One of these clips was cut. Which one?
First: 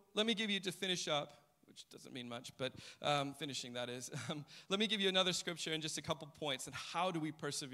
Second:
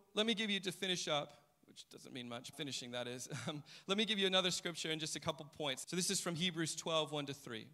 second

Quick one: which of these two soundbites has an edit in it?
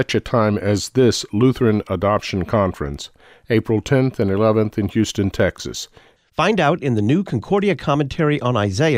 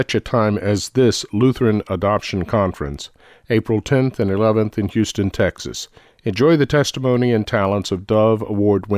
first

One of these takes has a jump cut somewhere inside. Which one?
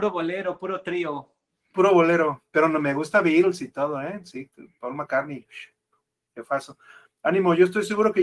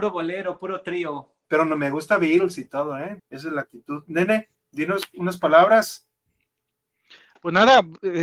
second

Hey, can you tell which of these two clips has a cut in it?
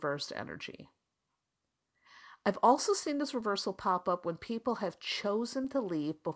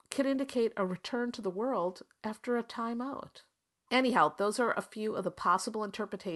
second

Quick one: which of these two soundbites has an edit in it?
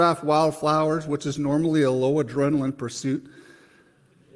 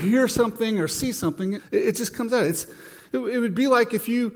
second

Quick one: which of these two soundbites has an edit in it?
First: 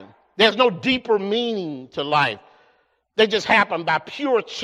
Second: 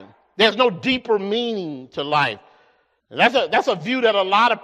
second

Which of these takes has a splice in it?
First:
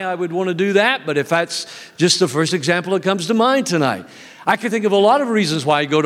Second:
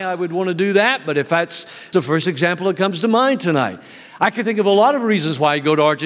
second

